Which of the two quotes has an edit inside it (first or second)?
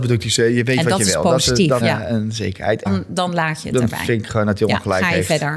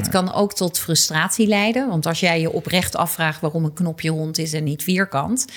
first